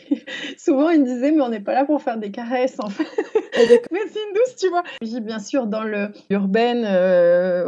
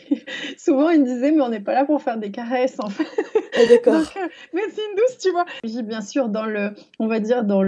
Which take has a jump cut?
first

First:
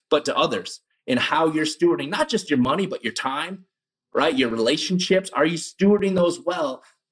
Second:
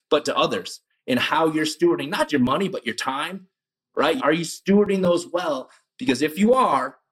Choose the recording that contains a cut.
second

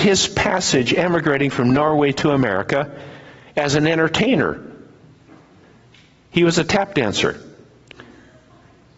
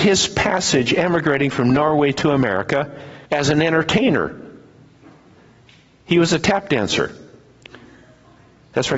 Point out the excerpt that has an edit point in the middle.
second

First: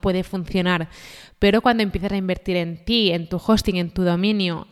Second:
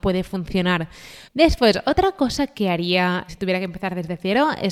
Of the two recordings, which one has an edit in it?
second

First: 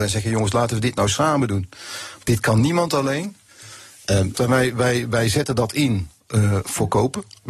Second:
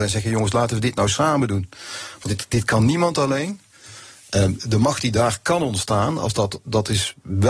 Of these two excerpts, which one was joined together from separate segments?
first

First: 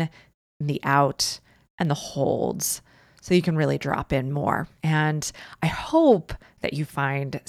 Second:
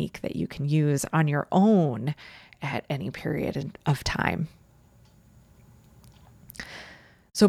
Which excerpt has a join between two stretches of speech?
first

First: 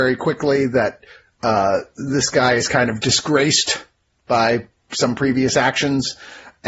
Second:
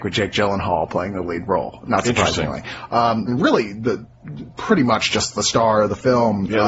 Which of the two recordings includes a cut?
second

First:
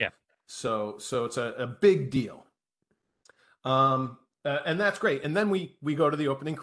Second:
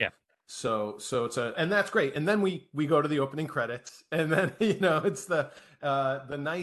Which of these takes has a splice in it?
second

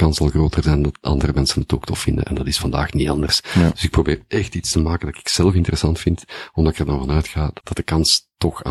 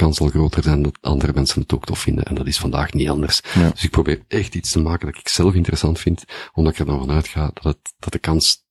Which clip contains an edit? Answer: first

